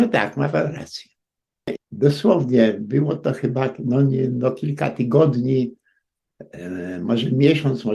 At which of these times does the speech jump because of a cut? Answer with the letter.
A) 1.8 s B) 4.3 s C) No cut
A